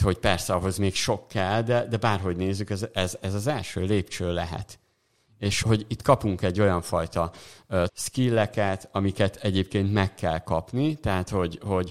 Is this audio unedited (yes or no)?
no